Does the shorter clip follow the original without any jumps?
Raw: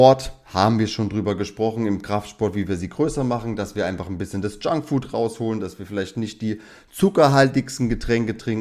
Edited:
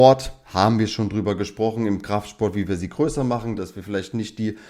no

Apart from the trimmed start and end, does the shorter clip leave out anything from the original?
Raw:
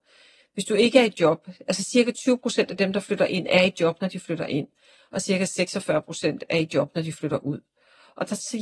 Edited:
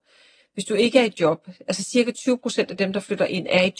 no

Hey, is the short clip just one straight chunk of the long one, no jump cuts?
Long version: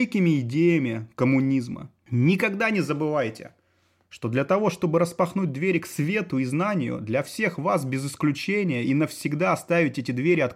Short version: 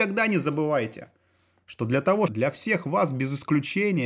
no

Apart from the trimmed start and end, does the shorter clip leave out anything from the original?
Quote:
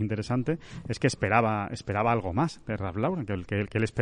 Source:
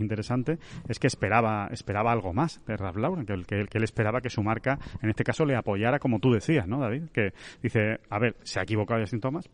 no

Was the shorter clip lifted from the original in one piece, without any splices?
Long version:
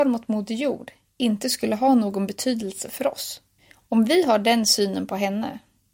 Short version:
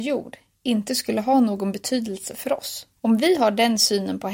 no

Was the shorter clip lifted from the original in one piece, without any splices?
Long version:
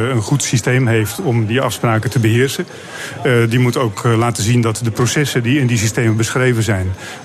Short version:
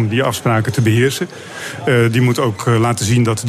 yes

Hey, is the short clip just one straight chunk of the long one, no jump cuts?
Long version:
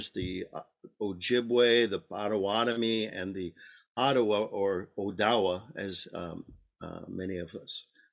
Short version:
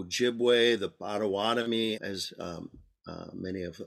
no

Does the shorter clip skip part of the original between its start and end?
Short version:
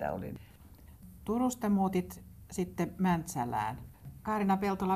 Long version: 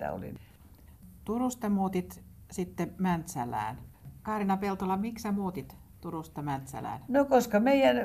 no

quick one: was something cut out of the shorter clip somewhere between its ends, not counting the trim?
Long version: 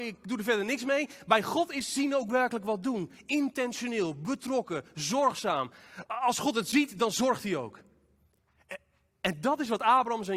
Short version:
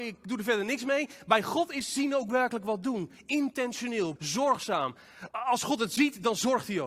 yes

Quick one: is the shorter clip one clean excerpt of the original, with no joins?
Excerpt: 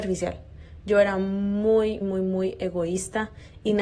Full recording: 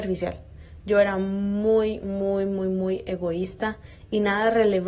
no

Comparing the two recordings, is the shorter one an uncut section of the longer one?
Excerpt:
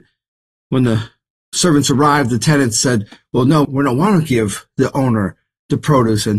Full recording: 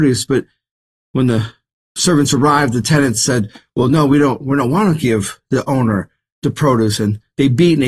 no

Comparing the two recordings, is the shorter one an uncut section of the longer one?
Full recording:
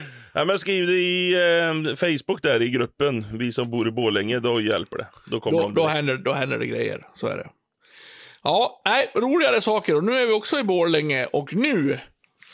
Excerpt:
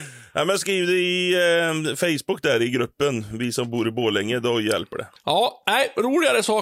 no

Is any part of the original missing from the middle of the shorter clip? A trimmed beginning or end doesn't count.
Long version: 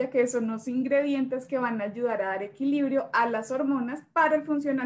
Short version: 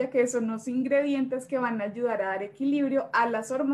no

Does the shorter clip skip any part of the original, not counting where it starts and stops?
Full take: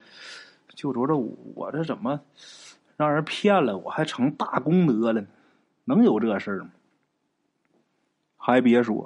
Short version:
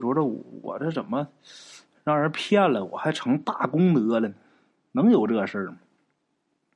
no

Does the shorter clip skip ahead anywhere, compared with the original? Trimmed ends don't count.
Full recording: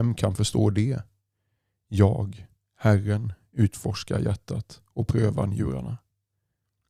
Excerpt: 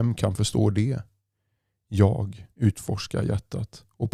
yes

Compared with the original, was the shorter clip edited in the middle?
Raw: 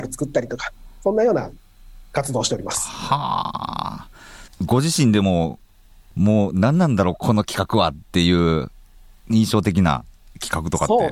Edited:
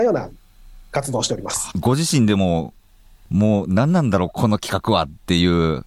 yes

